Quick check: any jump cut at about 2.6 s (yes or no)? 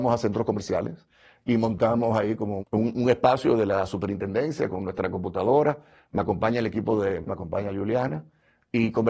yes